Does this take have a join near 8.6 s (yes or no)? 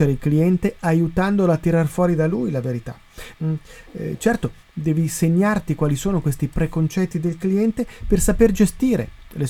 no